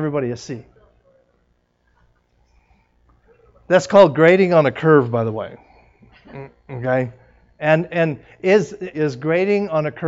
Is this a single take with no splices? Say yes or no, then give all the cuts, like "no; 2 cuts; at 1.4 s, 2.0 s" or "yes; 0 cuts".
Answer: no; 2 cuts; at 7.9 s, 8.9 s